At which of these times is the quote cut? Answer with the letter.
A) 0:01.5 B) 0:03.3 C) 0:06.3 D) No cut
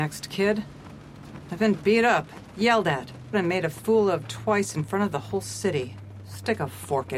B